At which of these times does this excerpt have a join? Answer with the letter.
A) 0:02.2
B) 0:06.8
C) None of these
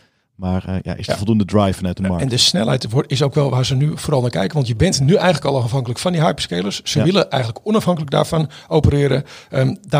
C